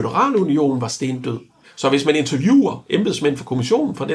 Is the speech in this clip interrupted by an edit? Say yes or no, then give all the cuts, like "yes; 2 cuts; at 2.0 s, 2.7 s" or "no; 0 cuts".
yes; 1 cut; at 1.6 s